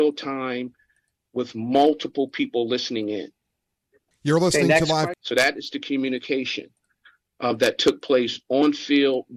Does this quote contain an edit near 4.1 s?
yes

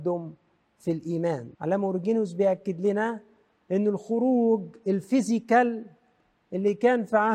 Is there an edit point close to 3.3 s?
no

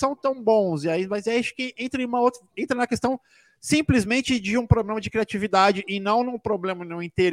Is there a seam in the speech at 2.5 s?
no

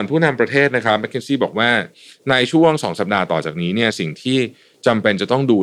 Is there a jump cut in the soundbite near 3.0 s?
yes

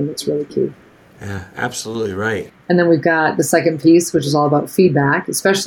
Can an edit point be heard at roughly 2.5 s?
yes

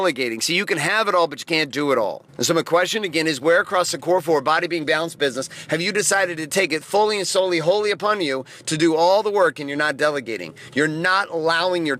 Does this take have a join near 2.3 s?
yes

